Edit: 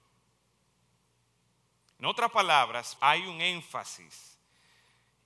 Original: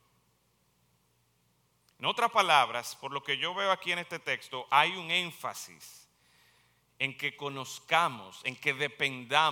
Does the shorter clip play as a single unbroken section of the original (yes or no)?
no